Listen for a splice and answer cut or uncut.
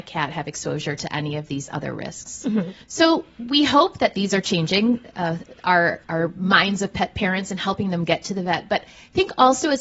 cut